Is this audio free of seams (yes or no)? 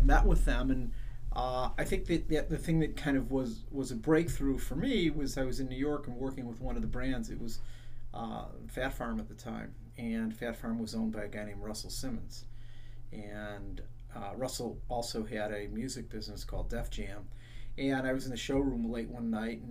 yes